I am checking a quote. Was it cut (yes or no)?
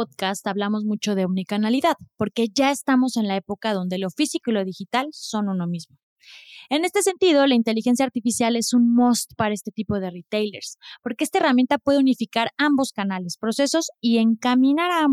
no